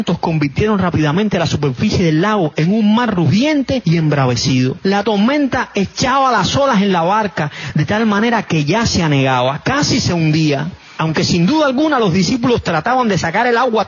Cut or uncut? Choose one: uncut